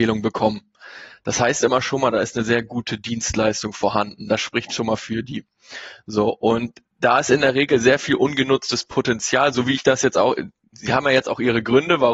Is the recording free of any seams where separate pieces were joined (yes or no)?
yes